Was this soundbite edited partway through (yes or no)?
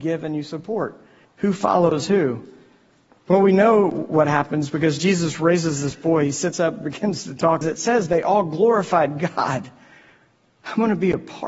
yes